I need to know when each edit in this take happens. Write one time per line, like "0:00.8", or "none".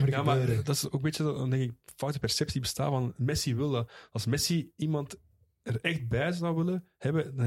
none

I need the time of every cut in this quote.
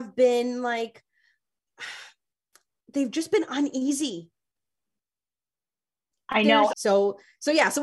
0:06.7

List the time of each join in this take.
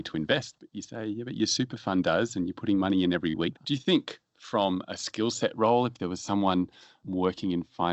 0:03.5

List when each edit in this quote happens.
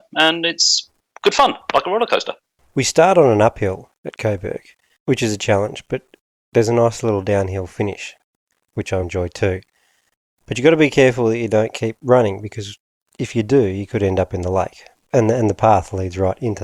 0:09.0
0:14.9

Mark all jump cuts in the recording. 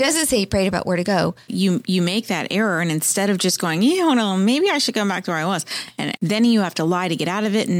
0:01.5
0:06.2

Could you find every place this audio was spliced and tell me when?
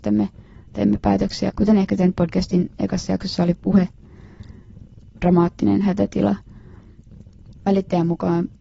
0:01.5
0:05.2
0:07.6

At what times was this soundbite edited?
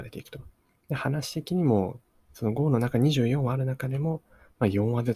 none

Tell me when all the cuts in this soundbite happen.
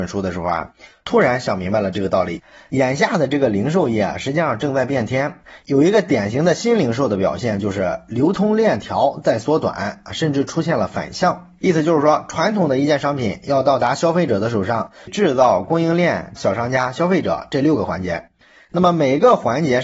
0:11.6
0:15.1
0:16.4

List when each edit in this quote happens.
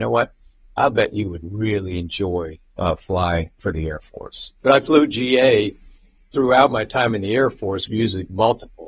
0:04.6
0:07.9

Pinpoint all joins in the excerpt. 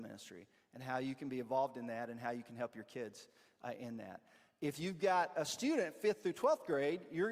none

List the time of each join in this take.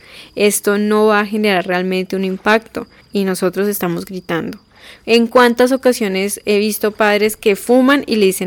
0:03.0

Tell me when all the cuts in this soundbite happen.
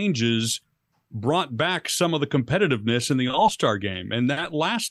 none

